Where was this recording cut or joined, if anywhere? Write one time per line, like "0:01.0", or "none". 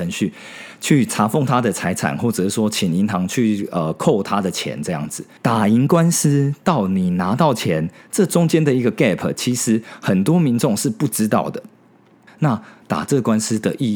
0:05.4
0:12.3